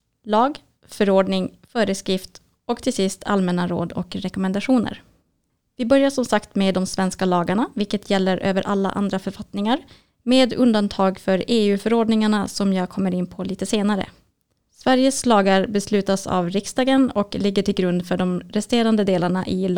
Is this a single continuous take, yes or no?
yes